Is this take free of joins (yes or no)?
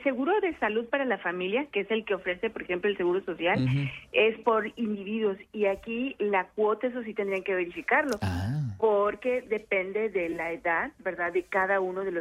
yes